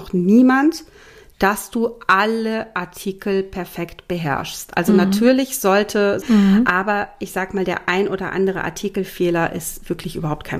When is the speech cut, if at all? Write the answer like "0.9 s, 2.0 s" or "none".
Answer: 6.2 s

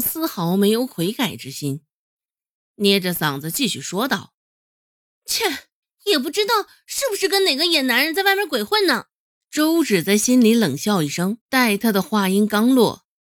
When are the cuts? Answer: 5.8 s, 9.4 s, 11.4 s

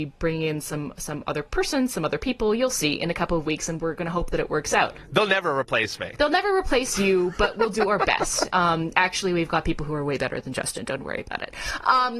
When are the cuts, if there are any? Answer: 11.0 s

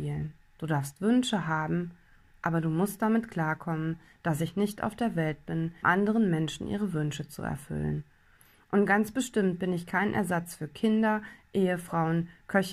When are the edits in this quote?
5.8 s

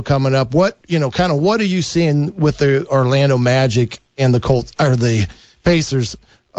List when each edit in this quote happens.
4.1 s

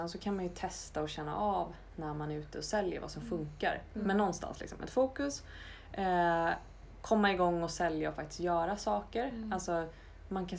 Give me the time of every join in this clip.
none

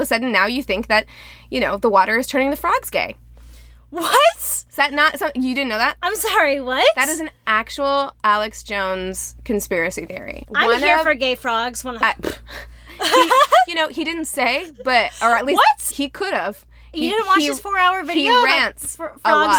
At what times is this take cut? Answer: 10.4 s, 12.0 s, 15.9 s

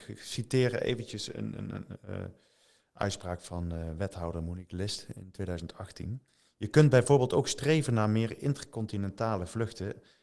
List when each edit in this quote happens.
none

